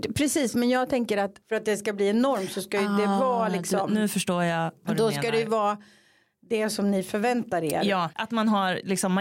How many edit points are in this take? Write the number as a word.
one